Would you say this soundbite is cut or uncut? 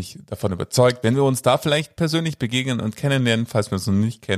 cut